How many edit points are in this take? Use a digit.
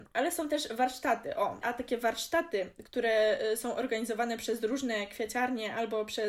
1